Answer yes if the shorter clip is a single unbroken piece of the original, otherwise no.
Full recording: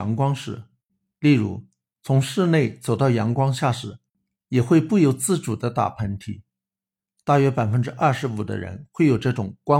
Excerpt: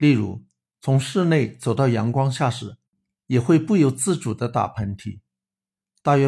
yes